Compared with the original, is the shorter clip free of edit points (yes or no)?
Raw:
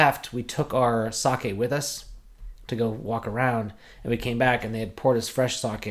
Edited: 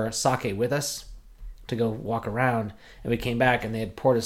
yes